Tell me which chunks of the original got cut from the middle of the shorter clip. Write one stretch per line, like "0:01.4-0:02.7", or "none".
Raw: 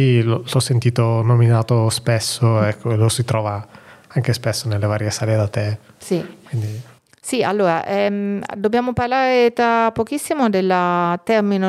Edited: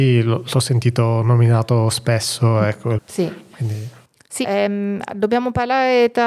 0:03.0-0:05.9
0:07.4-0:07.8